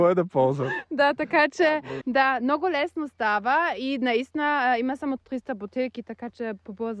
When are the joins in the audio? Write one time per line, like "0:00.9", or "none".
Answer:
0:02.0
0:05.2